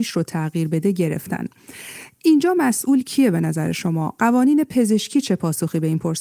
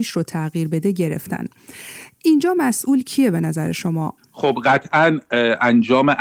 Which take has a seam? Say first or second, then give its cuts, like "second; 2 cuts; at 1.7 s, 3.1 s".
second; 1 cut; at 4.2 s